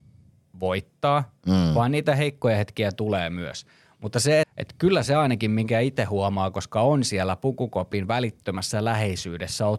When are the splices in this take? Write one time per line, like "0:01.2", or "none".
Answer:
0:04.4